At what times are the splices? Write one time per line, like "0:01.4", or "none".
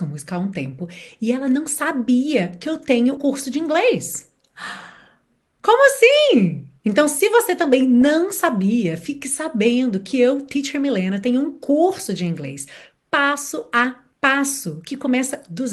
0:03.2